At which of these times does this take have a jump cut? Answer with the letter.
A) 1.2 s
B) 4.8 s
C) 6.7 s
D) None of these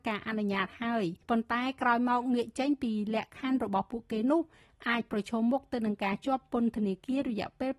A